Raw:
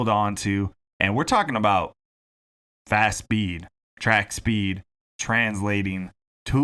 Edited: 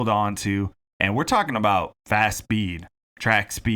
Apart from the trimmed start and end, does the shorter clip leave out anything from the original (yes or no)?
yes